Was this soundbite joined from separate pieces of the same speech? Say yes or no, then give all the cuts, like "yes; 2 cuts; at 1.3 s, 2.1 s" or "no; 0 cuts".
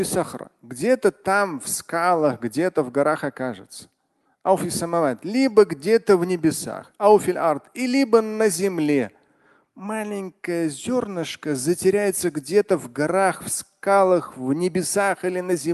no; 0 cuts